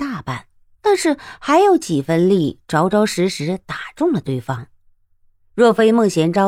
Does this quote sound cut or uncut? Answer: uncut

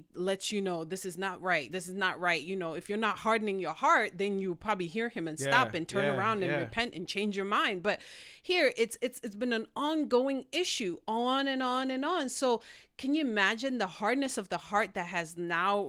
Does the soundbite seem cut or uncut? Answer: uncut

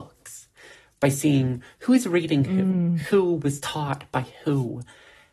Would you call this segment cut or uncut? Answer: uncut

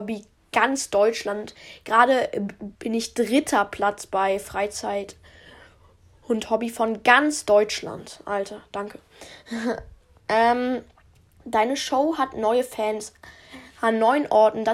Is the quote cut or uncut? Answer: cut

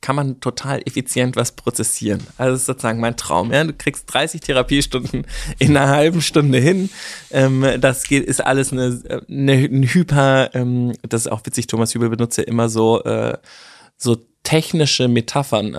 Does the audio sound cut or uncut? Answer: uncut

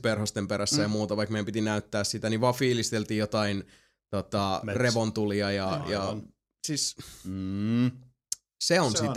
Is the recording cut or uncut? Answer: uncut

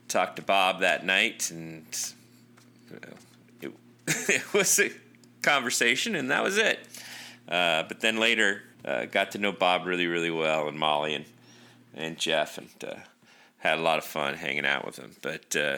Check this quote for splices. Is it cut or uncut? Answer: cut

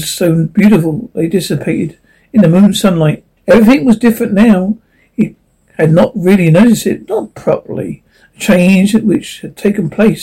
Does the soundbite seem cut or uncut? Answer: cut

